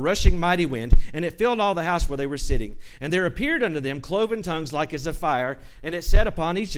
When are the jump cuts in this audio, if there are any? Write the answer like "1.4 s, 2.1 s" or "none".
none